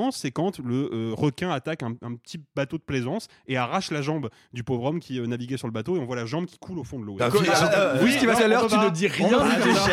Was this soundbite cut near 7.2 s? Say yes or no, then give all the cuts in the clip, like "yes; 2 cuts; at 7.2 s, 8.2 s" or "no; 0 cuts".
yes; 2 cuts; at 7.2 s, 8.4 s